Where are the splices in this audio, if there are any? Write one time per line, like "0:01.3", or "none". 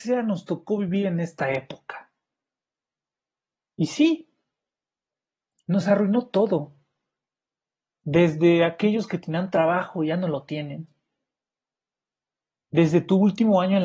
none